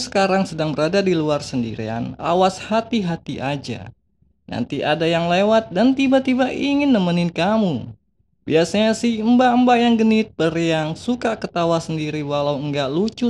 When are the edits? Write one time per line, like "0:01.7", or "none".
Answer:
none